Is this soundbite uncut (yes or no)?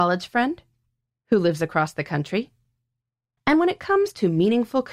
no